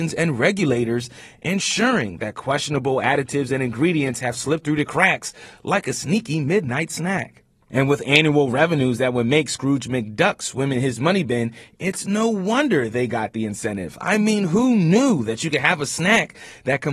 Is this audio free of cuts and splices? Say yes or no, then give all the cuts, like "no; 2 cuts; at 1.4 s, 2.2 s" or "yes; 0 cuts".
yes; 0 cuts